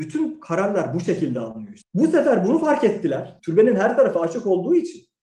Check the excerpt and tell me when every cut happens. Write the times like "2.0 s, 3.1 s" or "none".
1.8 s, 3.4 s

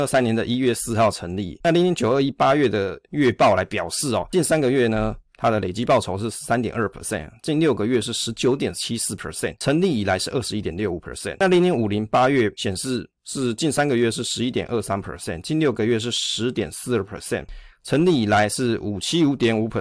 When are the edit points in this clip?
1.6 s

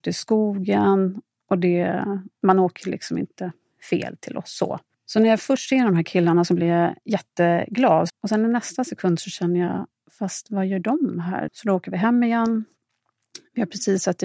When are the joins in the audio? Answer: 8.1 s, 11.5 s

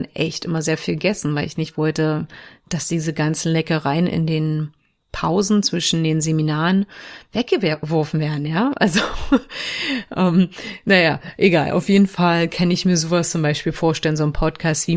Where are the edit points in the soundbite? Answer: none

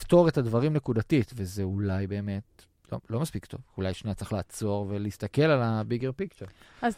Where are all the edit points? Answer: none

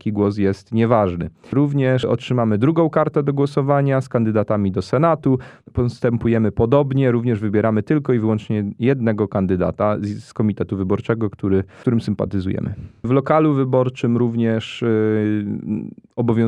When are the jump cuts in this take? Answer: none

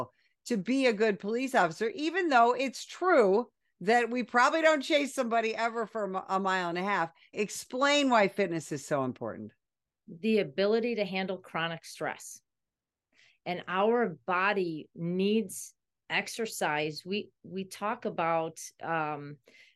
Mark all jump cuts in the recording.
7.3 s

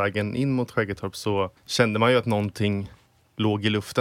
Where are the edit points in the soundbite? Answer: 1.6 s

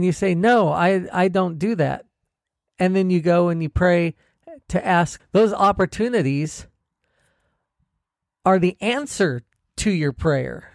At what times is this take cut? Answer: 5.2 s

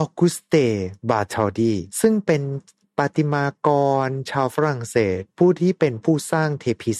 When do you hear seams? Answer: 1.9 s

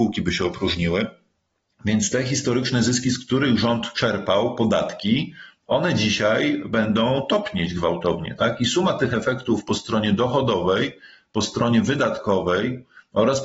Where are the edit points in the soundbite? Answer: none

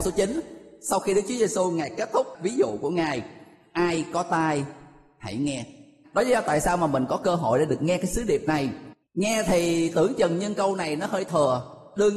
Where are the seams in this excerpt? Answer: 6.0 s, 9.0 s

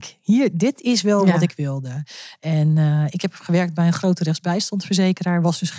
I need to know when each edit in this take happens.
none

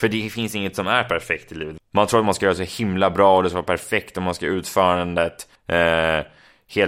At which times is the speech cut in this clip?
1.8 s, 5.6 s

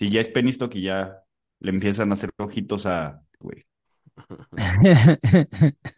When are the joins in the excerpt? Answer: 3.4 s

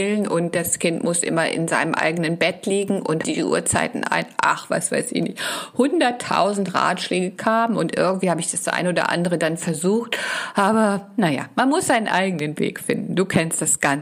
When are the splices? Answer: 3.2 s

